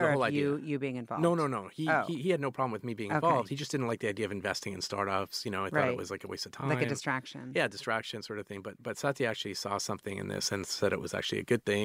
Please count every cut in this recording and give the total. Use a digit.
0